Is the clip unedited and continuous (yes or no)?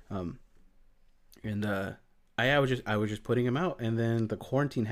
yes